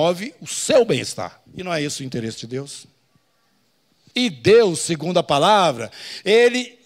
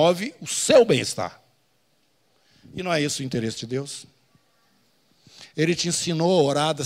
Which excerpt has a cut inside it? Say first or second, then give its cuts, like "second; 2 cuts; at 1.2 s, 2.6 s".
first; 2 cuts; at 1.5 s, 4.1 s